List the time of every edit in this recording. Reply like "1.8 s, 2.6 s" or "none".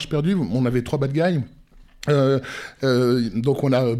none